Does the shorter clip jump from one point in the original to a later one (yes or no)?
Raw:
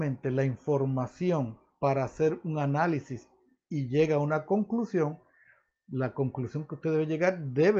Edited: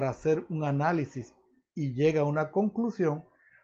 no